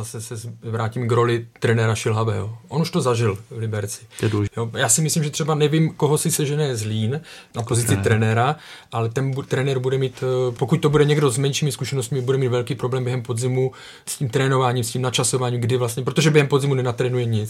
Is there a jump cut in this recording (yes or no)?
yes